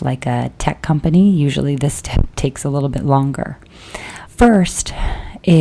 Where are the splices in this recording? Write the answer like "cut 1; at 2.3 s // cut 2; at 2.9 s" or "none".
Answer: cut 1; at 4.3 s